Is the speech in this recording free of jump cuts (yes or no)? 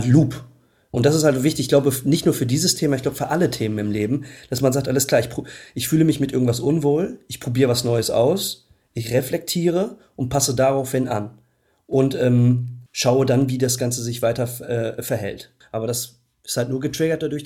no